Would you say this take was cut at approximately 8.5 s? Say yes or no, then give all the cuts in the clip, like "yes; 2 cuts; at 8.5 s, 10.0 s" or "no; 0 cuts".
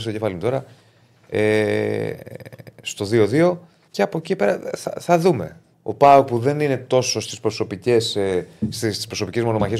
no; 2 cuts; at 3.9 s, 5.7 s